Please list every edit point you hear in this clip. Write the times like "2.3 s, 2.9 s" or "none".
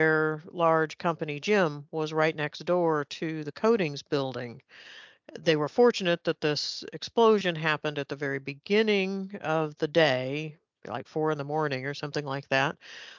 none

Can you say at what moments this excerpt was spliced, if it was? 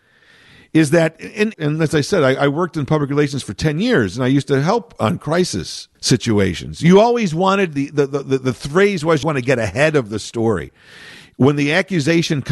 1.5 s, 6.0 s, 9.2 s

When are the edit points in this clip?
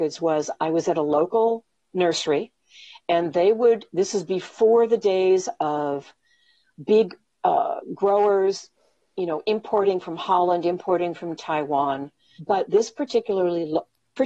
12.4 s

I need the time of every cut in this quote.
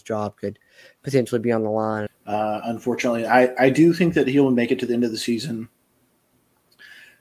2.1 s

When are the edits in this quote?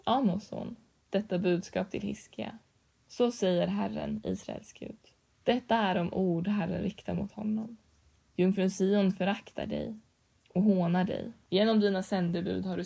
5.3 s, 11.5 s

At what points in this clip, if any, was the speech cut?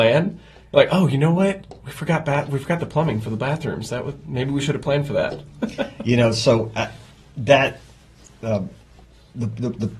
none

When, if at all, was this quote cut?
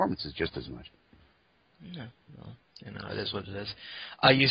none

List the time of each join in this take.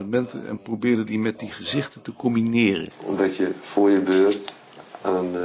2.9 s

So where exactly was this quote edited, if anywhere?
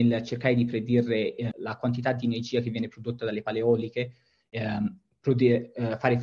1.5 s

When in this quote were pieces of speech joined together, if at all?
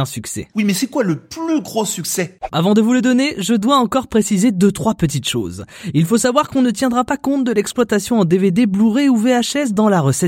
2.5 s

